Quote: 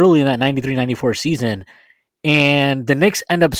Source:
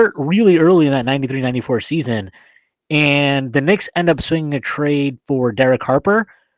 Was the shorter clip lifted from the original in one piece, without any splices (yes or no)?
yes